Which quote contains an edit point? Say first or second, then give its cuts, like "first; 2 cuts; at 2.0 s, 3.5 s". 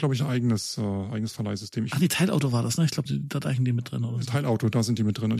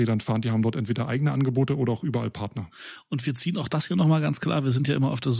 first; 1 cut; at 3.1 s